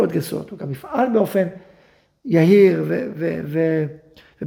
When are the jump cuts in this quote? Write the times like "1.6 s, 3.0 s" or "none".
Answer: none